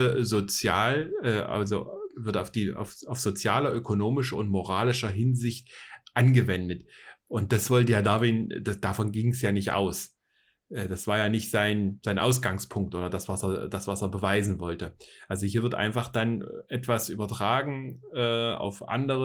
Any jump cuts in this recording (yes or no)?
no